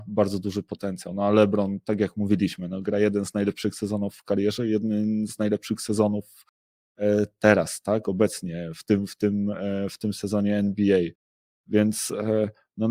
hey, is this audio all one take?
yes; 0 cuts

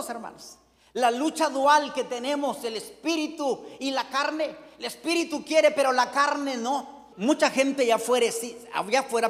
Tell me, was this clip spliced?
yes; 1 cut; at 7.1 s

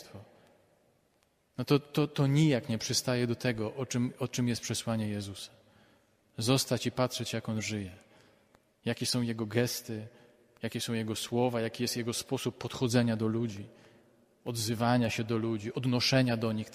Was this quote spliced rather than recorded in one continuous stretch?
no; 0 cuts

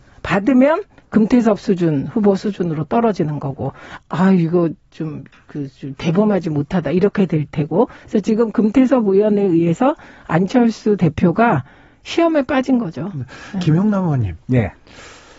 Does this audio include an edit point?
yes; 1 cut; at 4.0 s

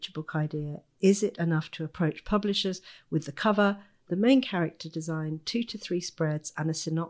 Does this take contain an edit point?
no; 0 cuts

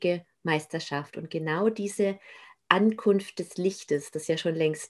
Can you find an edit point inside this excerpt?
no; 0 cuts

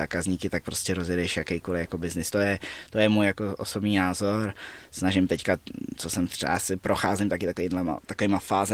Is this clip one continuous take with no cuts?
yes; 0 cuts

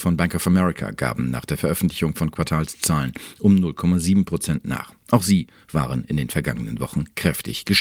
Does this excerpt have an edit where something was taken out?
no; 0 cuts

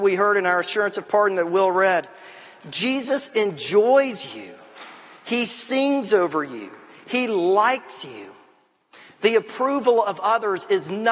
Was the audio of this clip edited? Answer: no; 0 cuts

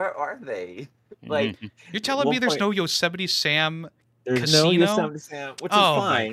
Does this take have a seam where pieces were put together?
no; 0 cuts

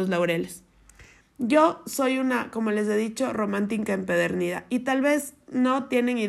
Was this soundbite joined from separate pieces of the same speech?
yes; 1 cut; at 1.2 s

